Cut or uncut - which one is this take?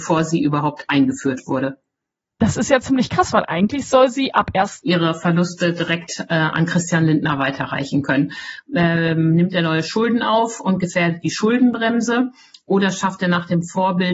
cut